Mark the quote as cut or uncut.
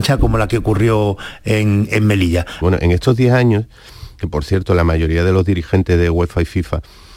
cut